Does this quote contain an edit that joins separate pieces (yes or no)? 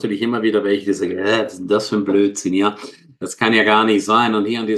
no